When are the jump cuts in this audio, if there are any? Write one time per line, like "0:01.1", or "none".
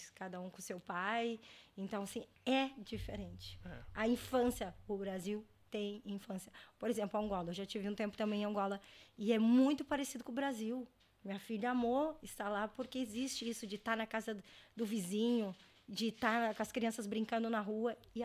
none